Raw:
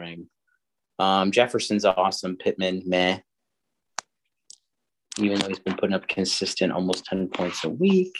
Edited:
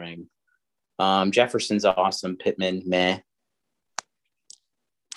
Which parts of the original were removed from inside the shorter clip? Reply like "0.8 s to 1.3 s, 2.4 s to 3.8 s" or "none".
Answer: none